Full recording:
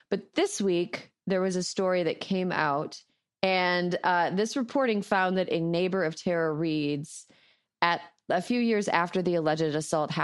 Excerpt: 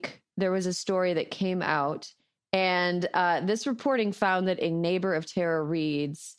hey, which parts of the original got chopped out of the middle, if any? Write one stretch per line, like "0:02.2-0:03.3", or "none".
none